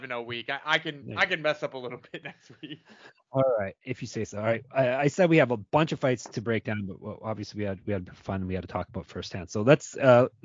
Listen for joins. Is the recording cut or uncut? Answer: uncut